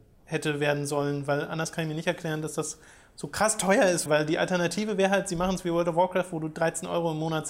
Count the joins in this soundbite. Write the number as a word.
one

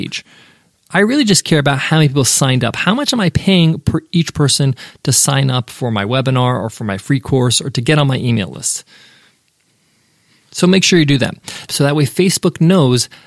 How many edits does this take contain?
one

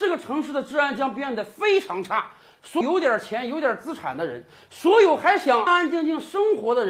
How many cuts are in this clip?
two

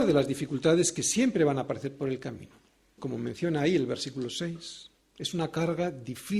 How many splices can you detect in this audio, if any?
two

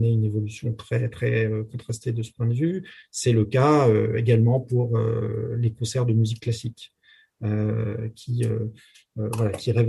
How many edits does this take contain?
zero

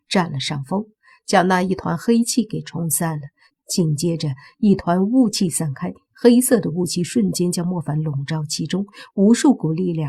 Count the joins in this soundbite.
one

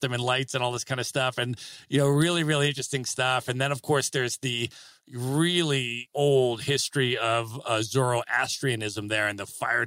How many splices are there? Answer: zero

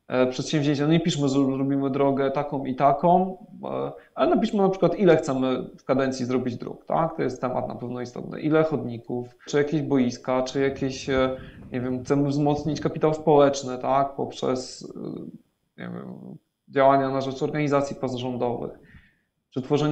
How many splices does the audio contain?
one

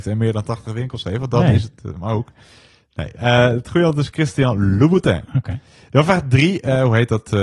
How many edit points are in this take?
zero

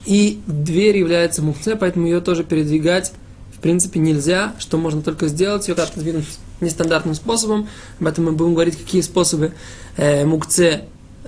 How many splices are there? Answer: one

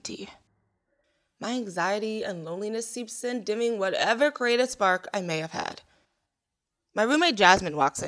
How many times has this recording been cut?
zero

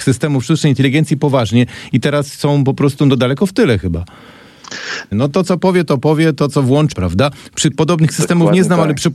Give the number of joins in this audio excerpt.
two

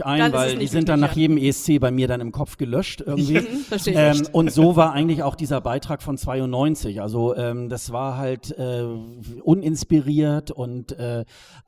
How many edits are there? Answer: zero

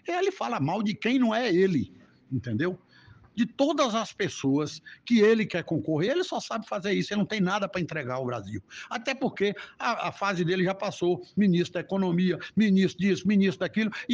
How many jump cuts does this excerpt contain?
zero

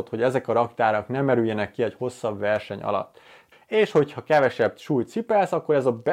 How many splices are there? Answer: one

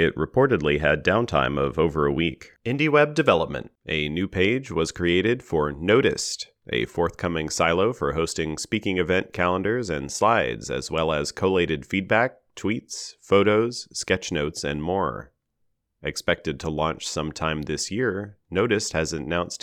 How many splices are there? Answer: two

